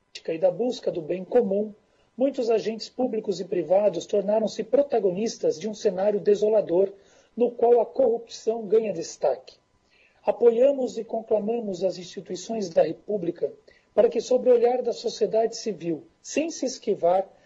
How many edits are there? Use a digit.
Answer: 0